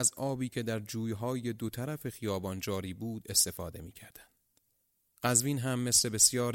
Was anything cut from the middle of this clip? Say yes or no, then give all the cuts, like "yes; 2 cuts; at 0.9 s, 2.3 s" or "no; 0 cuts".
no; 0 cuts